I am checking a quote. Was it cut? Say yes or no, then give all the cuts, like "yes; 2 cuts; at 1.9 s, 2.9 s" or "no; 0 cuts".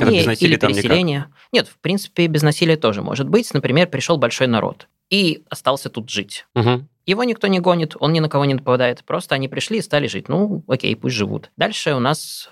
no; 0 cuts